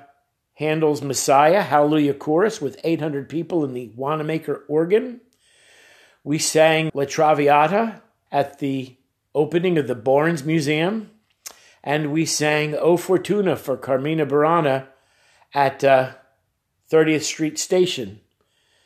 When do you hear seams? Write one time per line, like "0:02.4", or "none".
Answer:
0:06.9
0:08.3